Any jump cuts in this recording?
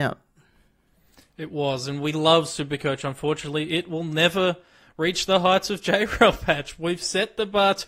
no; 0 cuts

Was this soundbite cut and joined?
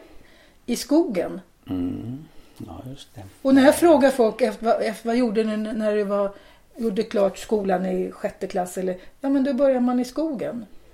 no; 0 cuts

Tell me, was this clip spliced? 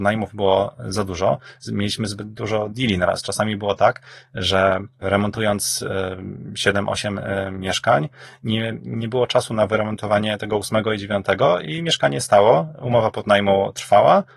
no; 0 cuts

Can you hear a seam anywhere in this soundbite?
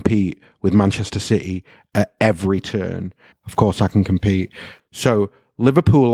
yes; 2 cuts; at 3.3 s, 4.8 s

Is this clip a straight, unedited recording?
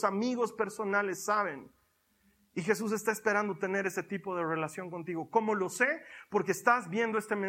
yes; 0 cuts

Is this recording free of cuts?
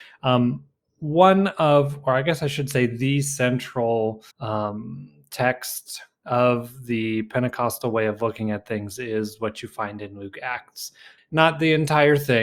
no; 2 cuts; at 4.3 s, 11.2 s

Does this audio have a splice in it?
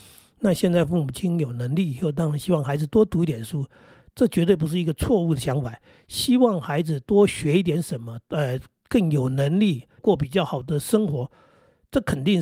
yes; 1 cut; at 10.0 s

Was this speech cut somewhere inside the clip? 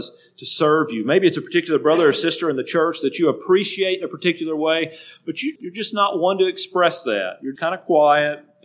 yes; 2 cuts; at 5.6 s, 7.6 s

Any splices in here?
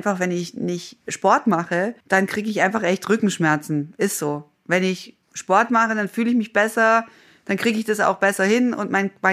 yes; 1 cut; at 2.0 s

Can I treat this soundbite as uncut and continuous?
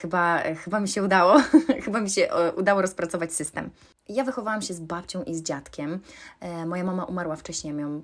yes; 0 cuts

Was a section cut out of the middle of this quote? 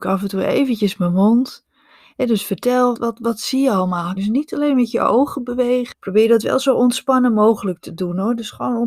yes; 3 cuts; at 2.9 s, 4.2 s, 5.9 s

